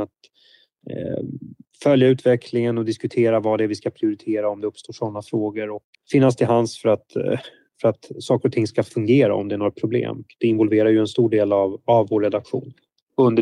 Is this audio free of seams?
no; 2 cuts; at 5.9 s, 10.3 s

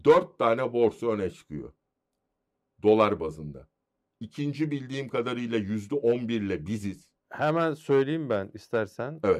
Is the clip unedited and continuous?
no; 2 cuts; at 4.0 s, 7.2 s

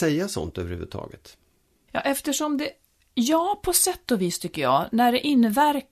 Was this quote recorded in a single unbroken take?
no; 1 cut; at 1.9 s

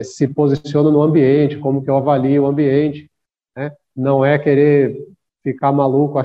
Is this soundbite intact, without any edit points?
yes; 0 cuts

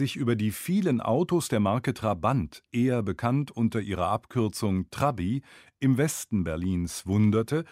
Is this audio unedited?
yes; 0 cuts

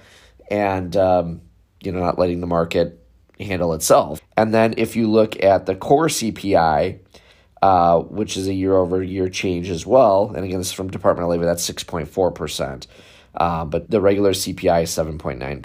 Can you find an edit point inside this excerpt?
yes; 2 cuts; at 4.2 s, 13.9 s

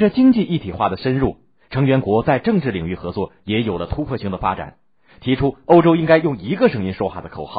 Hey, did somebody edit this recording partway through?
no; 0 cuts

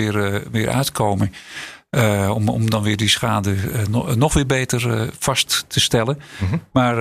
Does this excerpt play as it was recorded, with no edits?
yes; 0 cuts

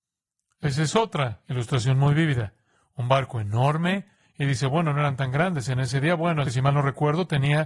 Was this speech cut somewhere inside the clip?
yes; 1 cut; at 6.4 s

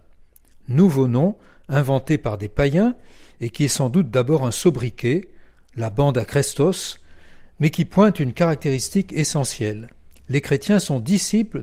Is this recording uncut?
yes; 0 cuts

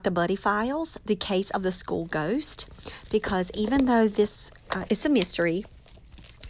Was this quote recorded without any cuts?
no; 1 cut; at 4.9 s

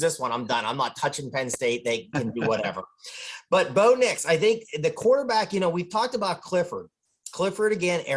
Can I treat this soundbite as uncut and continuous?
yes; 0 cuts

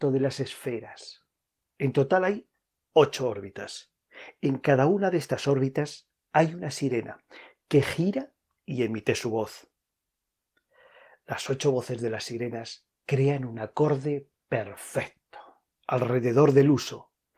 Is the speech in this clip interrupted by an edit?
yes; 1 cut; at 1.6 s

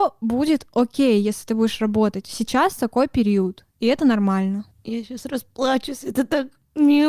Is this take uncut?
yes; 0 cuts

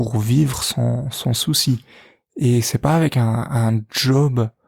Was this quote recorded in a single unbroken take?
yes; 0 cuts

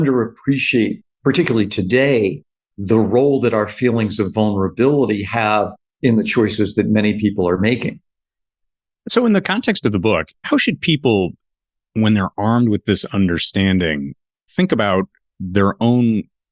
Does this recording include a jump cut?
no; 0 cuts

